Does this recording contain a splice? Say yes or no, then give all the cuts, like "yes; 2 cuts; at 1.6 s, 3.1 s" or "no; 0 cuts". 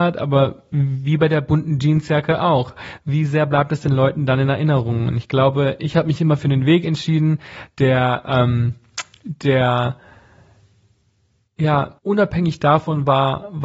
yes; 1 cut; at 12.0 s